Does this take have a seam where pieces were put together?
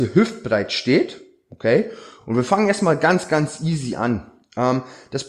no; 0 cuts

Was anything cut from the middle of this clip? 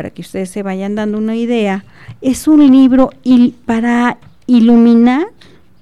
no; 0 cuts

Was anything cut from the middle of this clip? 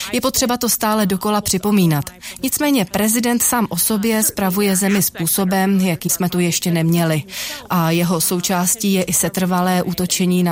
yes; 1 cut; at 2.4 s

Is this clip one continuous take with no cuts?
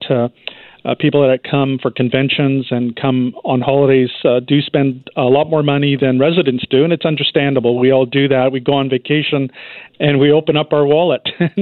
yes; 0 cuts

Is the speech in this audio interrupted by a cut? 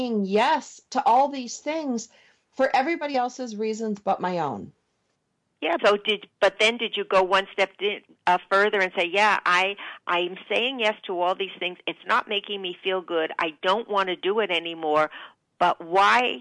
yes; 1 cut; at 5.8 s

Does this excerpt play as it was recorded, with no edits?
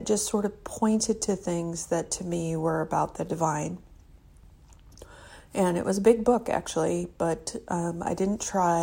yes; 0 cuts

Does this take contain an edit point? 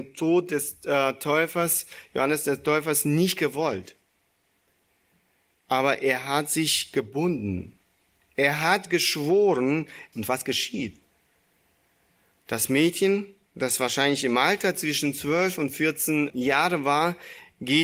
yes; 2 cuts; at 10.1 s, 16.3 s

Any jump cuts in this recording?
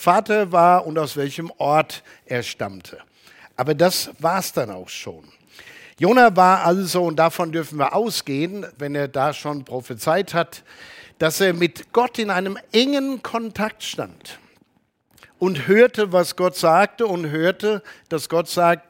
no; 0 cuts

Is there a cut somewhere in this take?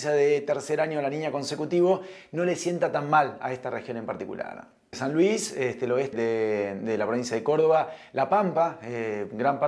yes; 1 cut; at 6.1 s

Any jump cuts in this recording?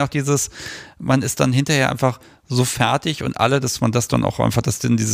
no; 0 cuts

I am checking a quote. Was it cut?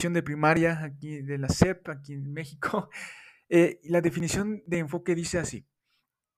no; 0 cuts

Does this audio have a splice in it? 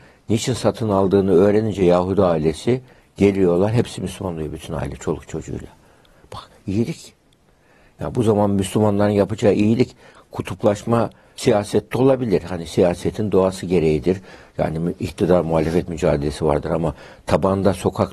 no; 0 cuts

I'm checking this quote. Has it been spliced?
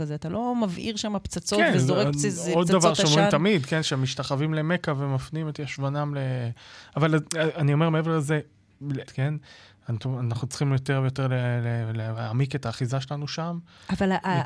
yes; 1 cut; at 9.1 s

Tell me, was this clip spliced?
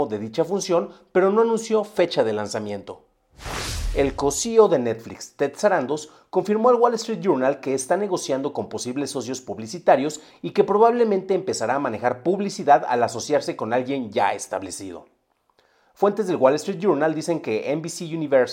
no; 0 cuts

